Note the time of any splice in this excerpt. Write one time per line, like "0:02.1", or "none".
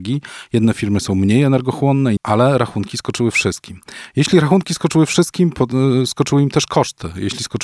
0:02.2